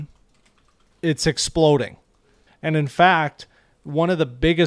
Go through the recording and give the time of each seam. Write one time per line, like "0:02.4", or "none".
0:00.9
0:02.5

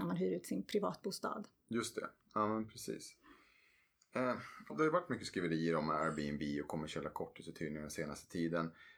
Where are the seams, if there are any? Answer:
0:04.7

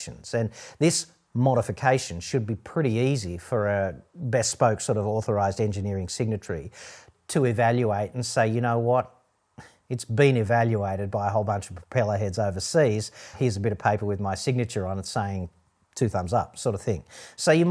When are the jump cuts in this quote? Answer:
0:13.3

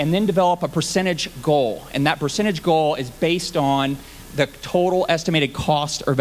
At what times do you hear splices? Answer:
none

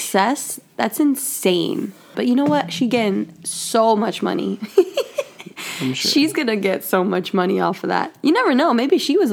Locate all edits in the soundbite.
0:02.1

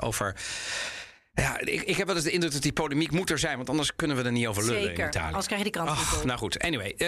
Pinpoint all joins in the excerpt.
none

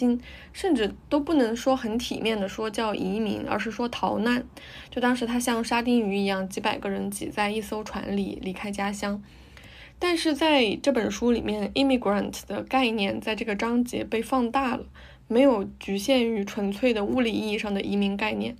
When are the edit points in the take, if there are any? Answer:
none

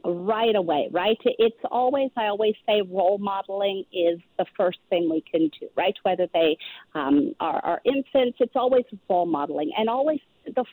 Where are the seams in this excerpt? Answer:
none

